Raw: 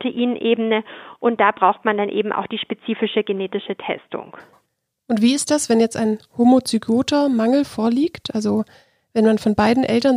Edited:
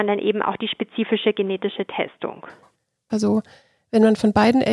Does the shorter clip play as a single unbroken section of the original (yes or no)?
no